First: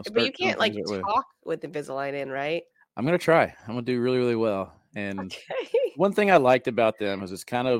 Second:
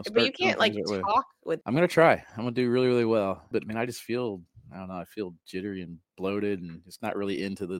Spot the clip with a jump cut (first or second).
second